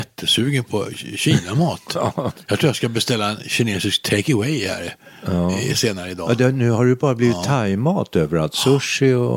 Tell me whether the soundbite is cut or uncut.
uncut